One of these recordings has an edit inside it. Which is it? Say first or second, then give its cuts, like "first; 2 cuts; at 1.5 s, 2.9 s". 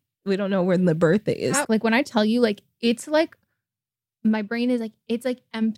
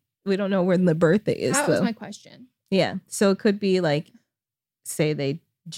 first; 1 cut; at 1.6 s